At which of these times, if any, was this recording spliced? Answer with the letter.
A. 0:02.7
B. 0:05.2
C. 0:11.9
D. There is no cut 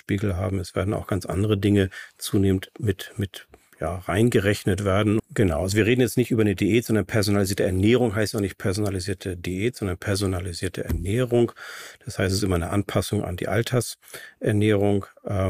B